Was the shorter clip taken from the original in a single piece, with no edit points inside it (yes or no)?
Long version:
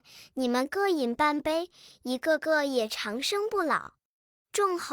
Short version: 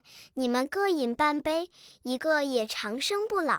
no